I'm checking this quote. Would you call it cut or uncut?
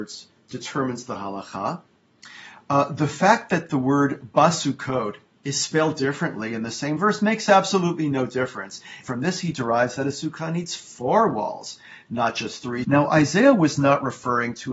cut